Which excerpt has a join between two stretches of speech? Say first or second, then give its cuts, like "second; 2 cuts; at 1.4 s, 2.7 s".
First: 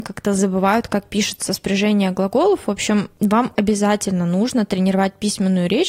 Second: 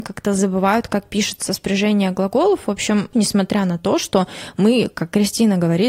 second; 1 cut; at 3.1 s